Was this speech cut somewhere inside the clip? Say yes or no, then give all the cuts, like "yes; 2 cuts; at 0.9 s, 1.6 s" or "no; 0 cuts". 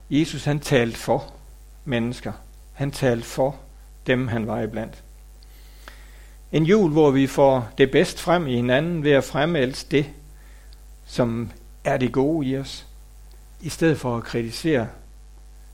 no; 0 cuts